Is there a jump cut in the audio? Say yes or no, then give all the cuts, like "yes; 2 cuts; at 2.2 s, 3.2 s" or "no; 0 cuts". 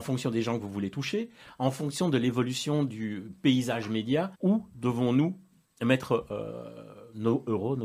yes; 1 cut; at 4.3 s